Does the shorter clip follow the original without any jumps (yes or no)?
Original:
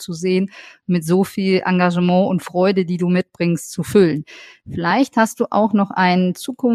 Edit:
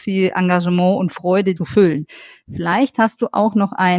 no